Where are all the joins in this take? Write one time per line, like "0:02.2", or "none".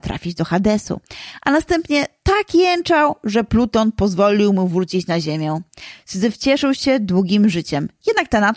none